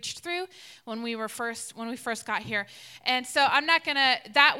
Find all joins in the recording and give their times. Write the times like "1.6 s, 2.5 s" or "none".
none